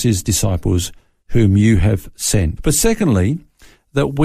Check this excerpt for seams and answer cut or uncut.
cut